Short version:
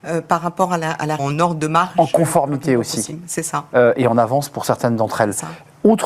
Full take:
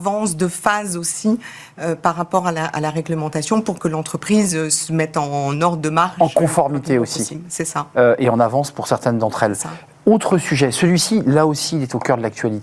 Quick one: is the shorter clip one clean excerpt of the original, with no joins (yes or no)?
no